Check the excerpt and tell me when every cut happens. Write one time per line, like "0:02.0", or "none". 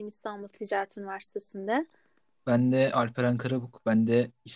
none